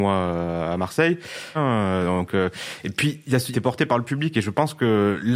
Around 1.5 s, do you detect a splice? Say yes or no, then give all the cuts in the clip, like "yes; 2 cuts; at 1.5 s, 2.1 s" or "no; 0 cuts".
yes; 2 cuts; at 1.5 s, 3.5 s